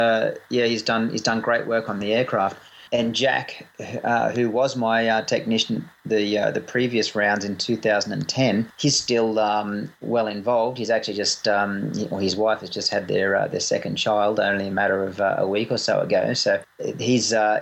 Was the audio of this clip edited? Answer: no; 0 cuts

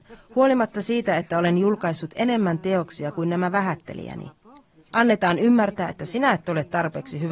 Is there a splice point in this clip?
yes; 1 cut; at 4.8 s

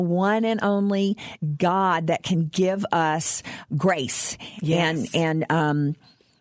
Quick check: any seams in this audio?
yes; 1 cut; at 3.7 s

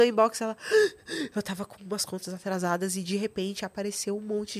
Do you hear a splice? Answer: no; 0 cuts

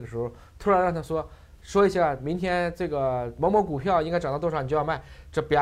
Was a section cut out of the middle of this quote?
no; 0 cuts

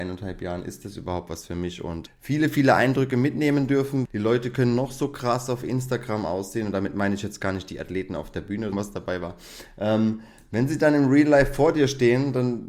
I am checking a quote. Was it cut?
yes; 3 cuts; at 2.1 s, 4.0 s, 8.7 s

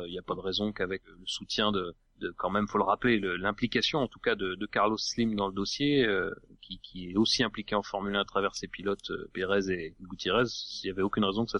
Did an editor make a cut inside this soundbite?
no; 0 cuts

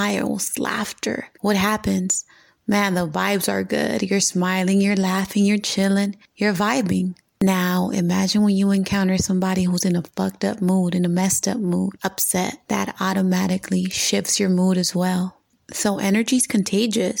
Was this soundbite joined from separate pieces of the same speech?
no; 0 cuts

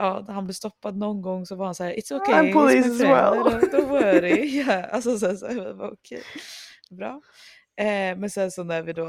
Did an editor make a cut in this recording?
no; 0 cuts

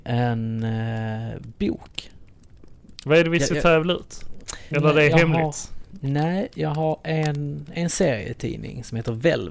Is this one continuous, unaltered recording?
no; 2 cuts; at 2.9 s, 4.7 s

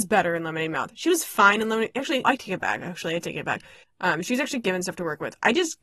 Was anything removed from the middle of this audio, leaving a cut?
yes; 2 cuts; at 2.2 s, 3.8 s

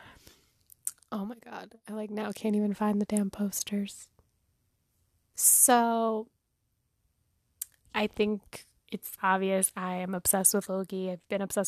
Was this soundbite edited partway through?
yes; 3 cuts; at 5.3 s, 7.8 s, 9.2 s

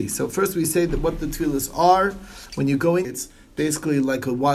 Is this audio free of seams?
no; 1 cut; at 3.0 s

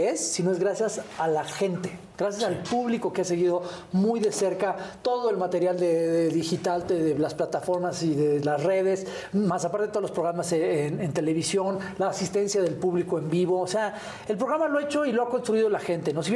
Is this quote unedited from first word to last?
yes; 0 cuts

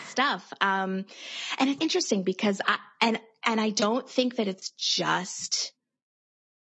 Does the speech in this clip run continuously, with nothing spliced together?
no; 1 cut; at 1.8 s

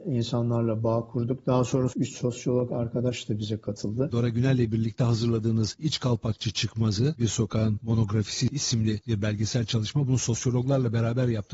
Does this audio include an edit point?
yes; 1 cut; at 4.1 s

